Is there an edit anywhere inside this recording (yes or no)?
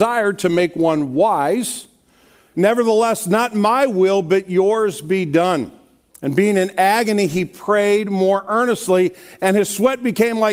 yes